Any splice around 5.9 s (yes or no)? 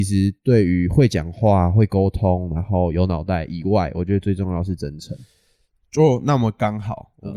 no